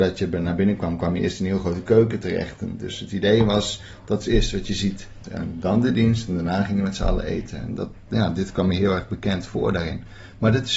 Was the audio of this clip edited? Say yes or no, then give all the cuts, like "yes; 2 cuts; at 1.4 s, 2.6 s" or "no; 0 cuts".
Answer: yes; 1 cut; at 5.2 s